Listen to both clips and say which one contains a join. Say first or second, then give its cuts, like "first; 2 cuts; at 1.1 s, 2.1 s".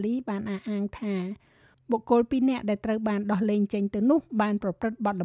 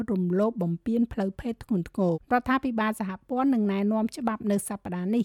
second; 1 cut; at 2.1 s